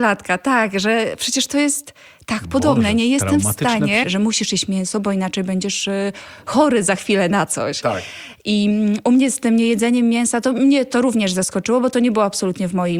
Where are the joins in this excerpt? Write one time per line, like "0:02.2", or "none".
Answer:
0:04.0